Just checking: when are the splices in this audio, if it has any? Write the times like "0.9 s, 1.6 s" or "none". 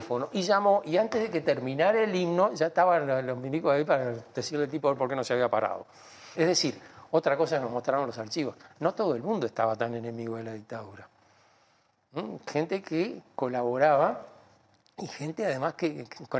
6.3 s